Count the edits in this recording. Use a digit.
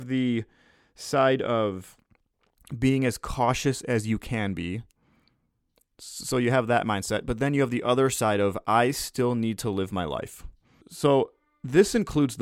1